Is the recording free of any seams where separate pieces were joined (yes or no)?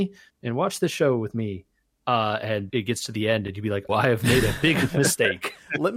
no